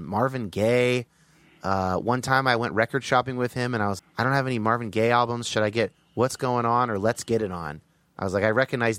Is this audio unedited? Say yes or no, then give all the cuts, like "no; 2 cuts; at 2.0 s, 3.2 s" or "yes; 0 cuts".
no; 1 cut; at 4.0 s